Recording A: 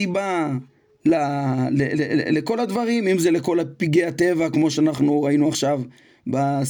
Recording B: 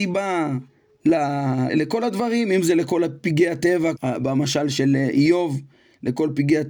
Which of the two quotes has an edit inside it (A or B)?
B